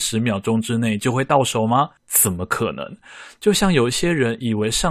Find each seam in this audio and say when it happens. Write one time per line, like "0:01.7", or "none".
0:02.0